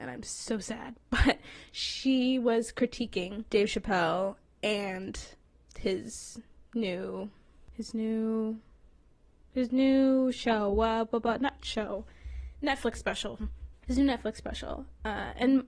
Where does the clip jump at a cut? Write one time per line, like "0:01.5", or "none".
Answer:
0:13.7